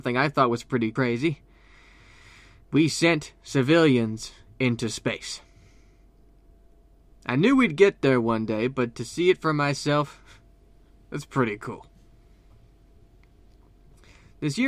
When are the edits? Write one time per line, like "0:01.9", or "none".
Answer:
none